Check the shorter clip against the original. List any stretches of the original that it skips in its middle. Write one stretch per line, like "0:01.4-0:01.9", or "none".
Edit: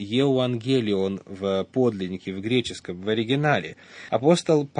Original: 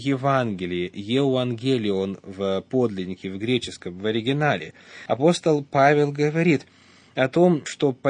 none